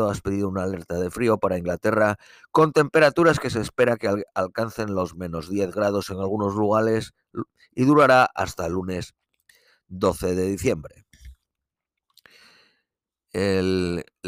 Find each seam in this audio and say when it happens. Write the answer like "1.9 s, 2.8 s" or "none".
none